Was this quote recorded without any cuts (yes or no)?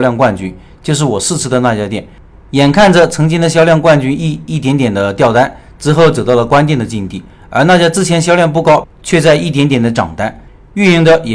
no